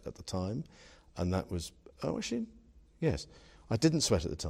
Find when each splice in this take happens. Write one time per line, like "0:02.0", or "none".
none